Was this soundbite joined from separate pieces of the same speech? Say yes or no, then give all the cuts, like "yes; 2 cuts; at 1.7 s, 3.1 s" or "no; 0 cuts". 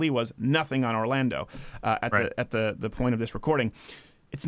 no; 0 cuts